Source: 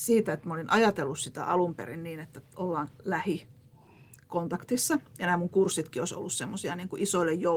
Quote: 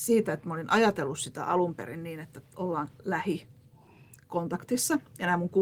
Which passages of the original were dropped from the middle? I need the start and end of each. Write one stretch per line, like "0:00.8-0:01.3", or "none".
none